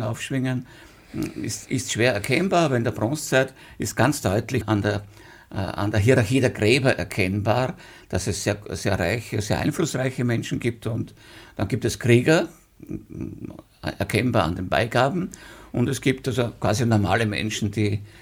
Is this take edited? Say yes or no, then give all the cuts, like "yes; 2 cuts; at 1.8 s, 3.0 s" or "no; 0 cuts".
yes; 1 cut; at 4.6 s